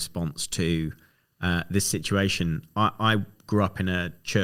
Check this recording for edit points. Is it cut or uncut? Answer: uncut